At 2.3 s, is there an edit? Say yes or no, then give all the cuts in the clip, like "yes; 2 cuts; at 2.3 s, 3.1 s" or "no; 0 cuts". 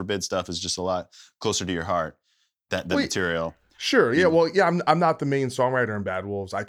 no; 0 cuts